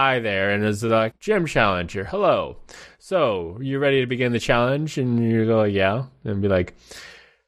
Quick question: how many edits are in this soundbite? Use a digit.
1